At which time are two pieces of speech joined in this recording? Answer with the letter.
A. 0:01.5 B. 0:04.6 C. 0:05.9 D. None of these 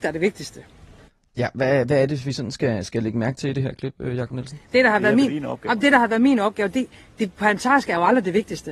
B